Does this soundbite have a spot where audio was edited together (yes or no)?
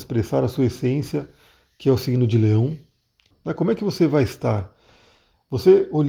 yes